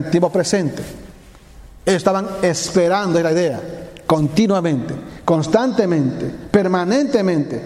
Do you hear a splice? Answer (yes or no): no